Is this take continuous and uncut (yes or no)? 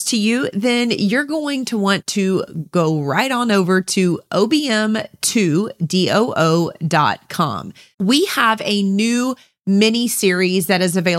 no